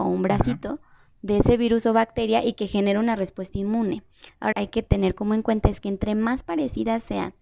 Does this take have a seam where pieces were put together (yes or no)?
yes